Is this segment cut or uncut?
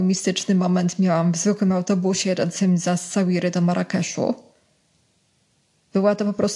uncut